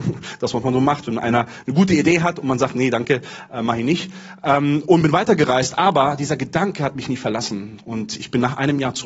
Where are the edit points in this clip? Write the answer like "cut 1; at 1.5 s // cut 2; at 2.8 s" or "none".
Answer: none